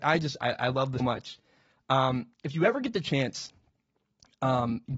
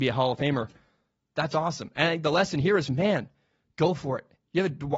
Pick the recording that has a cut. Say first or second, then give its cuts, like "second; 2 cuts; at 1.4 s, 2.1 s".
first; 2 cuts; at 1.0 s, 2.3 s